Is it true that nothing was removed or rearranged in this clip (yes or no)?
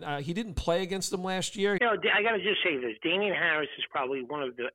no